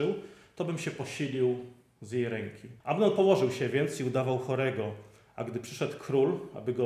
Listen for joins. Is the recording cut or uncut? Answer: cut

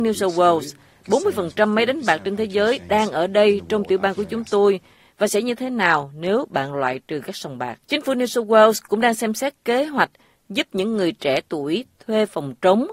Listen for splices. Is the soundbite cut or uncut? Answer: cut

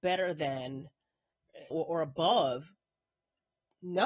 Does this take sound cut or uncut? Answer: cut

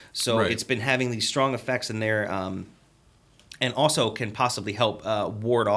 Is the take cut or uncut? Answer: uncut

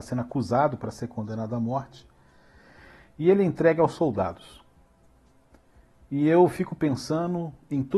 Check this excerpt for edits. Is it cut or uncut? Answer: uncut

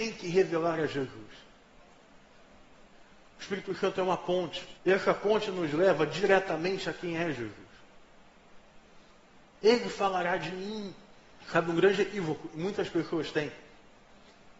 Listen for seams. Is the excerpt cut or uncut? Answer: cut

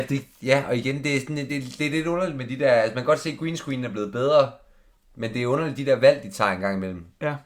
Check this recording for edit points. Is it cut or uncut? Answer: uncut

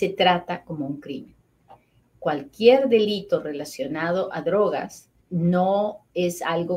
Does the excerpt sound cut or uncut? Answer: cut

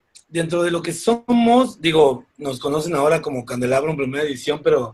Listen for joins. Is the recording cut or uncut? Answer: uncut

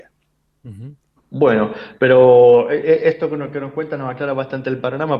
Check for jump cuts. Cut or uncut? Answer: cut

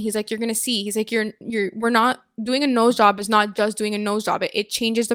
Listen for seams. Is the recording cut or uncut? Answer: uncut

